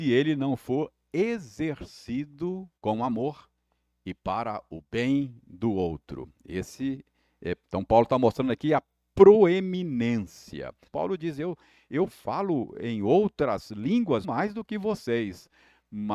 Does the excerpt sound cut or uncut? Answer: cut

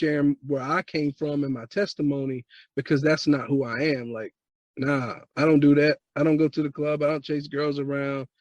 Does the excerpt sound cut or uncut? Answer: cut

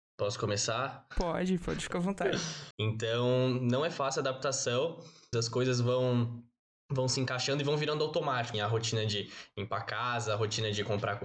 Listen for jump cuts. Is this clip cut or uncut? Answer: cut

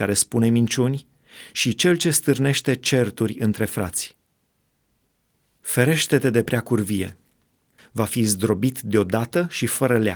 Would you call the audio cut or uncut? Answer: cut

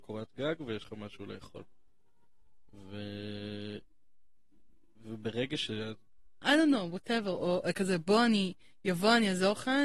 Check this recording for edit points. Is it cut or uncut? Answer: cut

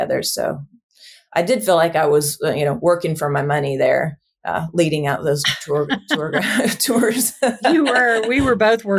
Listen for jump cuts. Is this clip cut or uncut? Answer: uncut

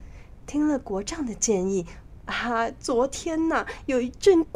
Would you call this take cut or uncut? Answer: cut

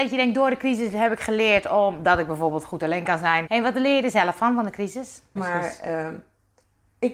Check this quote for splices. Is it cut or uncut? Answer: cut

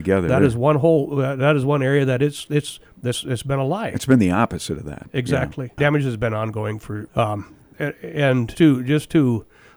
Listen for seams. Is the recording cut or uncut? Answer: cut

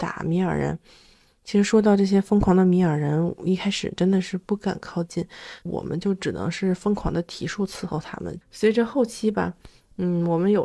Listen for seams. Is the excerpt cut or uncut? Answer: cut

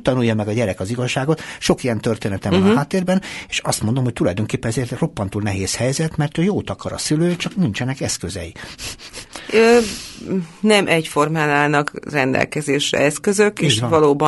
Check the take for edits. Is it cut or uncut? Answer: uncut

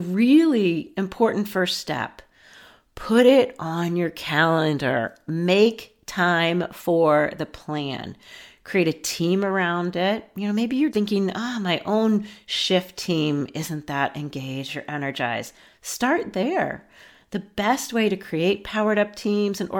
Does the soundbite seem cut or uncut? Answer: cut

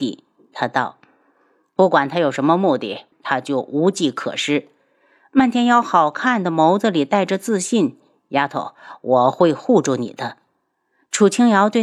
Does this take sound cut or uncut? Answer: cut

